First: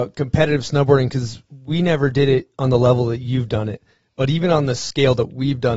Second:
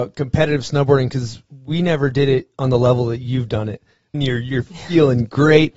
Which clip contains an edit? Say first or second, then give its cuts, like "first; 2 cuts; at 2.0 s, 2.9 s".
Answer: second; 1 cut; at 4.1 s